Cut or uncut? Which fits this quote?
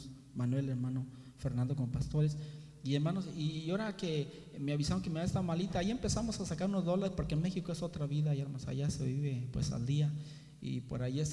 uncut